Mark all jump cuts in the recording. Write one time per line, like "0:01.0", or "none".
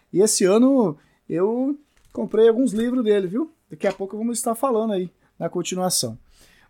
none

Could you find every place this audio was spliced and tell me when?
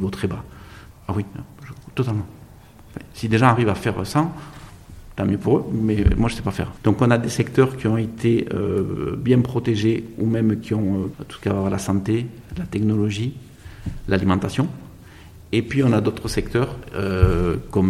0:00.9
0:06.8
0:11.1

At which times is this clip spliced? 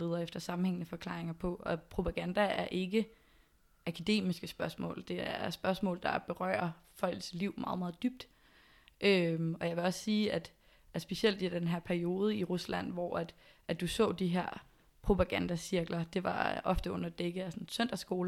none

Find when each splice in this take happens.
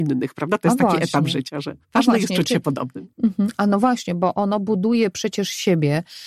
0:01.8
0:03.1

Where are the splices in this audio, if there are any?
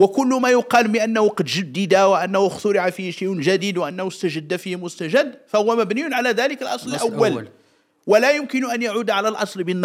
none

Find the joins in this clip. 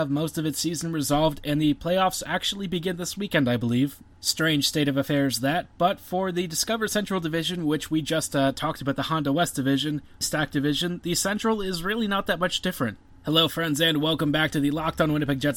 0:10.2
0:13.1

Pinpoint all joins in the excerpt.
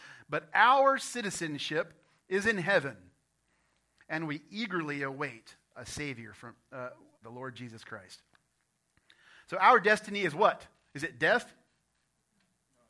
0:07.2

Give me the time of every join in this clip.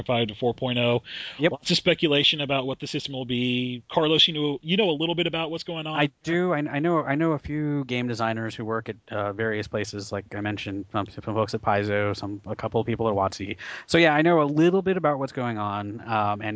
none

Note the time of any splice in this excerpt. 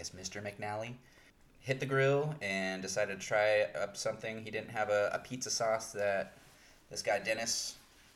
none

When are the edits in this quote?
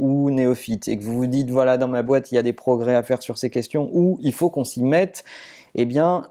none

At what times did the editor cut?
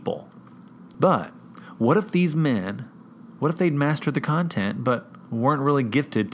0:00.9

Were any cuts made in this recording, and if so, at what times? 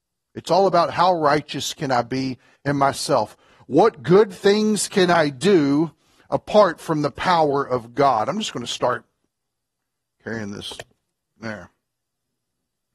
none

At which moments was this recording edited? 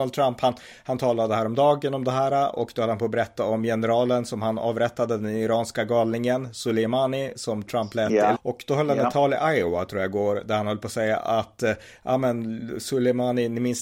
0:08.3

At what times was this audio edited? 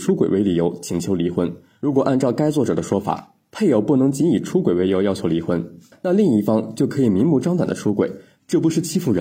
0:05.9

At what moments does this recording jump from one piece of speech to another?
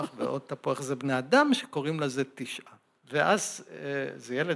0:03.0

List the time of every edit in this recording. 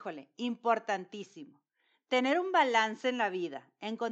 none

